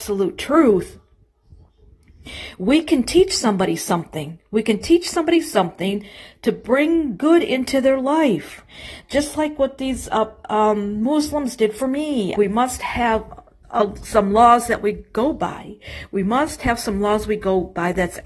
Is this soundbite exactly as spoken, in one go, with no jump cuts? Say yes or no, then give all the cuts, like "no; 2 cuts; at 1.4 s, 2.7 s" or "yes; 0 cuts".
no; 1 cut; at 12.3 s